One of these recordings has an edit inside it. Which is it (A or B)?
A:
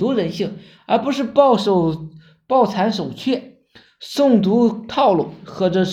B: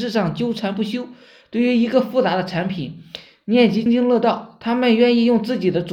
B